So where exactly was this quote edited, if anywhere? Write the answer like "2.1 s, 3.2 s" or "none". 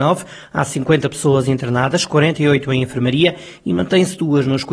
none